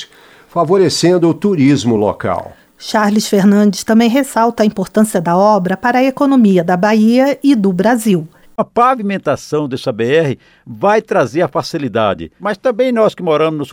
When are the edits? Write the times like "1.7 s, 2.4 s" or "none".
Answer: 8.4 s, 12.4 s